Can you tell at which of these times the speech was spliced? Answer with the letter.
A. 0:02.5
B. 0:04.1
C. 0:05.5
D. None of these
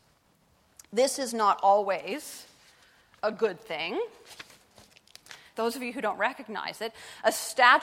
C